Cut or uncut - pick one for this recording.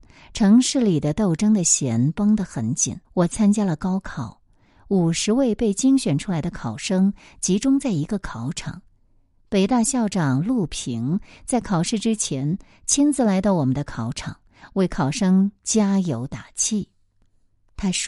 cut